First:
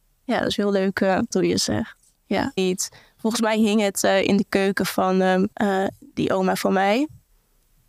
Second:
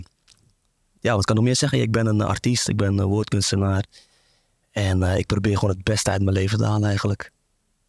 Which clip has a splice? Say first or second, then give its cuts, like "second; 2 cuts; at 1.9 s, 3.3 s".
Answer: first; 3 cuts; at 1.3 s, 2.6 s, 5.5 s